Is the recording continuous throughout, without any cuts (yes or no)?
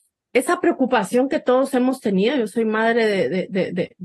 yes